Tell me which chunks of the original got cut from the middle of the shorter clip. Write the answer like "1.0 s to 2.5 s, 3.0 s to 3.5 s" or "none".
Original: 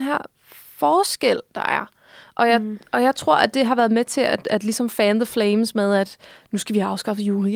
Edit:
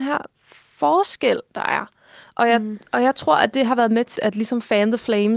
4.2 s to 4.4 s